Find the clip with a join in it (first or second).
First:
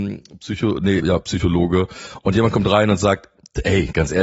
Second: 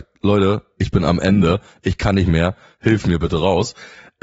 first